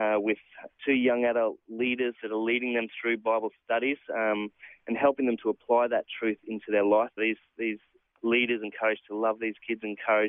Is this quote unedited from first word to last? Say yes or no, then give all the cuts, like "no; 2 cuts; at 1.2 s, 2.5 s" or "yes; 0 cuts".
no; 2 cuts; at 7.2 s, 8.6 s